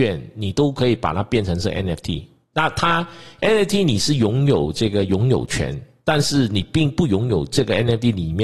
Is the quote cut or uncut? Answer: uncut